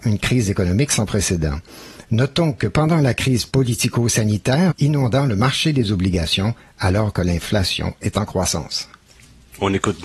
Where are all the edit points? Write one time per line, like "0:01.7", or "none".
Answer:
0:04.7